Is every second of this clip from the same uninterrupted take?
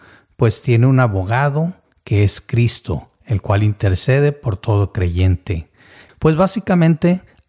no; 1 cut; at 6.1 s

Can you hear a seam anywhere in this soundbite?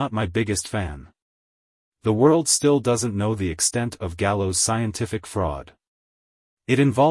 no; 0 cuts

